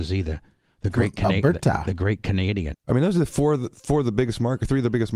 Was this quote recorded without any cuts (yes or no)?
no